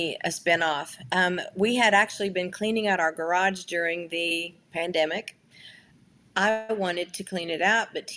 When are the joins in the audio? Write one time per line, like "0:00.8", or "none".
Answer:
none